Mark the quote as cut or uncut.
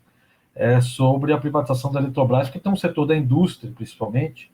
uncut